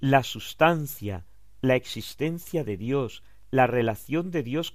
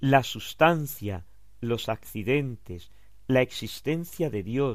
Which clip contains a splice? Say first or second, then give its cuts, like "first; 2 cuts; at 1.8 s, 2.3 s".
first; 2 cuts; at 1.6 s, 3.5 s